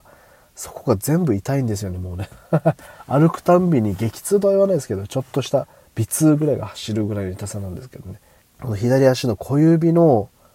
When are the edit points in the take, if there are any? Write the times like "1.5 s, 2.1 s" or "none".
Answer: 8.4 s